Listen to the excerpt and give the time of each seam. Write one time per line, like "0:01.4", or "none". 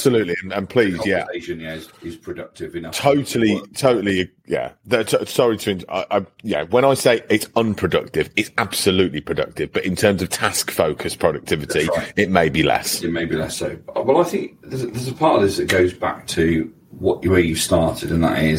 none